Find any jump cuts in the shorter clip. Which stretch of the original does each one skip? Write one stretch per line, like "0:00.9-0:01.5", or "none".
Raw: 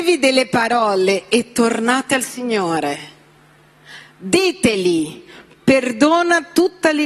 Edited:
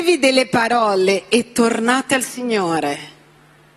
none